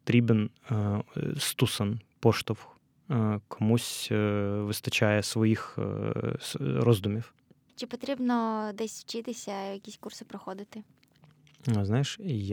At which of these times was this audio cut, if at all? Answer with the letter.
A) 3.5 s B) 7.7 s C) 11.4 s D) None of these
B